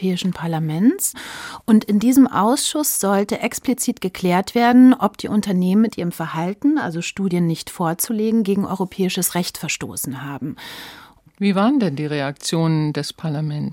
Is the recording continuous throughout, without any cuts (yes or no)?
yes